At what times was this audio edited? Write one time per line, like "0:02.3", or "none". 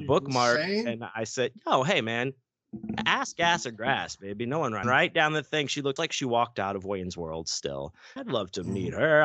0:04.8
0:06.0
0:08.2